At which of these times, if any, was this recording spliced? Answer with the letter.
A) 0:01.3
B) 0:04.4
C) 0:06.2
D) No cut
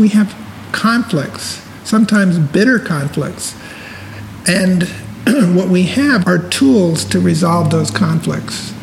C